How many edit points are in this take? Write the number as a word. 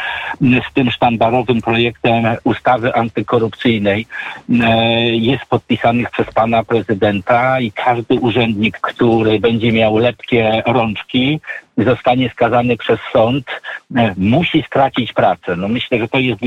one